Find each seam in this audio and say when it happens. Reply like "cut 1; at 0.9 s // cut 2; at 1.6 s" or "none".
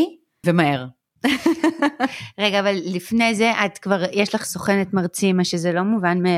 none